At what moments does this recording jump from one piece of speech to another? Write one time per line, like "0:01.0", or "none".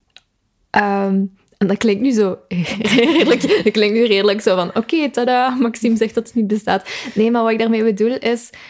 none